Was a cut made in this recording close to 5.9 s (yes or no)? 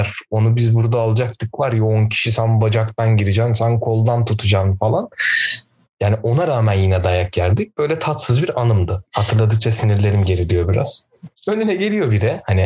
no